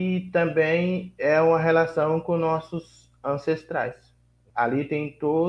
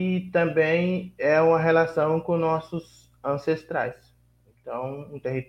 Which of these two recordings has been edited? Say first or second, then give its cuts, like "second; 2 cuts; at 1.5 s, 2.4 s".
first; 1 cut; at 4.5 s